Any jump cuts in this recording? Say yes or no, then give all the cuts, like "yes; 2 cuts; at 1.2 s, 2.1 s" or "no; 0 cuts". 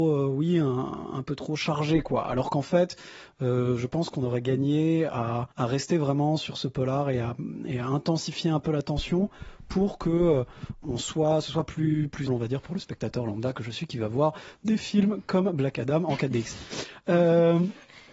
yes; 3 cuts; at 5.5 s, 10.8 s, 12.3 s